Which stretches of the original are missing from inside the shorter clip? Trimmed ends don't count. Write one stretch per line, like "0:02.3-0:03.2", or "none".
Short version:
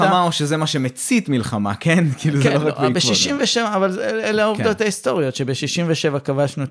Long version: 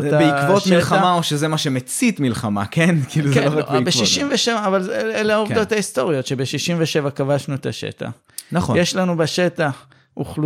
none